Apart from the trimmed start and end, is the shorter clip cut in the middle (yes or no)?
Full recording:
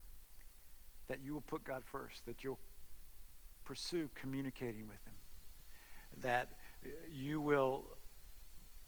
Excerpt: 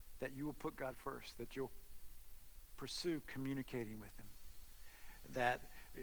no